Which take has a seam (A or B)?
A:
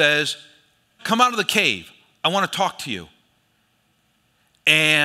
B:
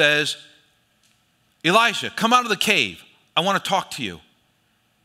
A